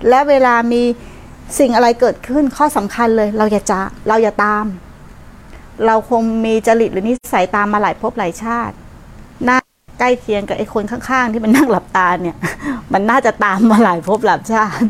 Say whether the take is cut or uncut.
uncut